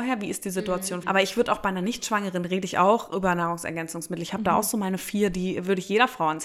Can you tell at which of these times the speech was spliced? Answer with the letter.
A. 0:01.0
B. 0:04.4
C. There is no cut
A